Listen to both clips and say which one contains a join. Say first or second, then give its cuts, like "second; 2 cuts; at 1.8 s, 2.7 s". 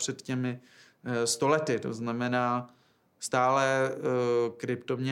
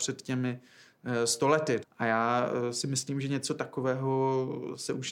second; 1 cut; at 1.8 s